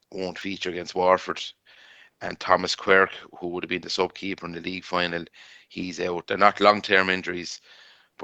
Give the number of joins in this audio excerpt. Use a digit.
1